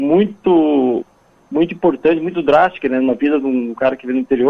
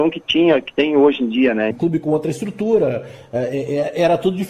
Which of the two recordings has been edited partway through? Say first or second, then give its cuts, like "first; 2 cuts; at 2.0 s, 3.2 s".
second; 1 cut; at 1.7 s